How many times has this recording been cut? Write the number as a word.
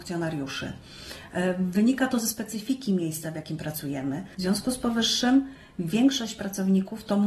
one